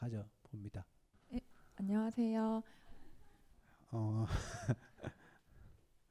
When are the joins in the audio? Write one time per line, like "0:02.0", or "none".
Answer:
0:02.9